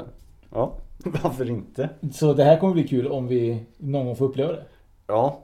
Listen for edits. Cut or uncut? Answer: cut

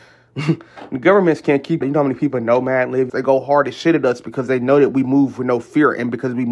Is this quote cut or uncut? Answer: cut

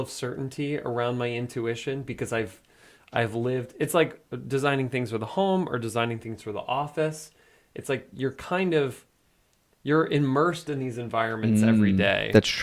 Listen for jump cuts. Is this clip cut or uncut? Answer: uncut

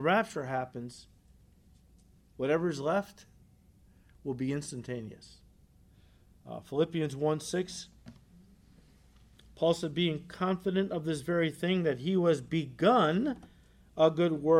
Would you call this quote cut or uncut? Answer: uncut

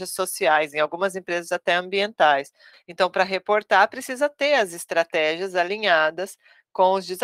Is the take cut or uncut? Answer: cut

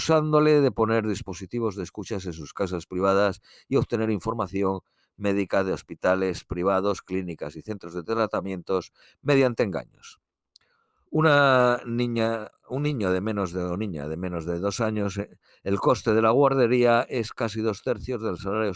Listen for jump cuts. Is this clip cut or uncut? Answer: cut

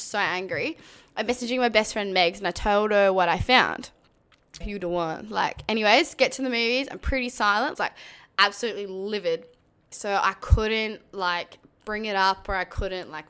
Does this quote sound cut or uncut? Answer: cut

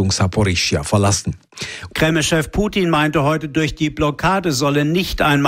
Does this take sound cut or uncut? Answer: cut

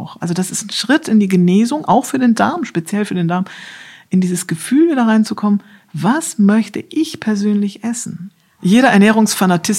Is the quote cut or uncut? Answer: uncut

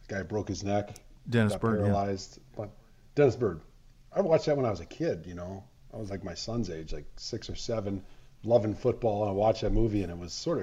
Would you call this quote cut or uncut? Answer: uncut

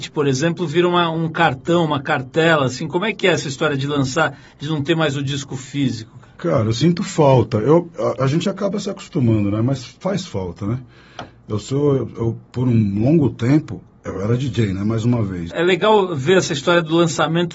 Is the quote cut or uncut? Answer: cut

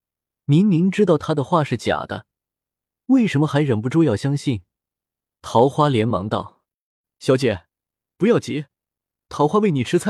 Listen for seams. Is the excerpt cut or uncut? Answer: cut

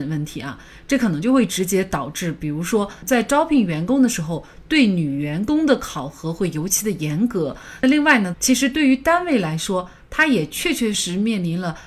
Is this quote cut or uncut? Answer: cut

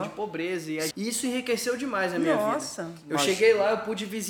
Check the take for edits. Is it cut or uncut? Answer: cut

